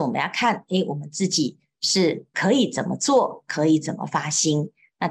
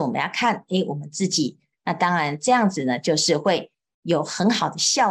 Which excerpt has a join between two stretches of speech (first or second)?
second